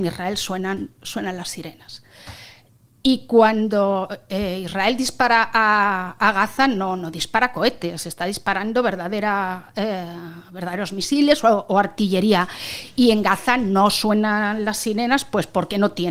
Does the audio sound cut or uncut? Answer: uncut